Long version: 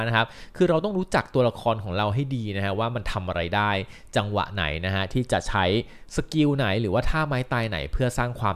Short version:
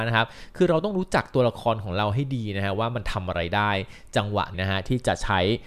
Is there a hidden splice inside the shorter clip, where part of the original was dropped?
yes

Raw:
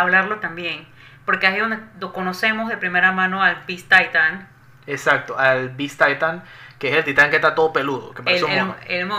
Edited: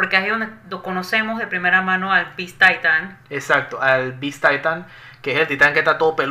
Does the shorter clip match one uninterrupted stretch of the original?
no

